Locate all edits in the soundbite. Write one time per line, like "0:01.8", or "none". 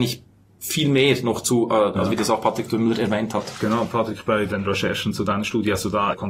0:01.9